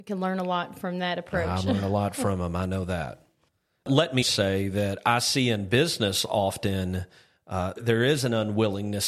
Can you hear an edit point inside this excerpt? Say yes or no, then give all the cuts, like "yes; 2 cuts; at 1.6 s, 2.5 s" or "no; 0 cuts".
yes; 2 cuts; at 4.2 s, 7.8 s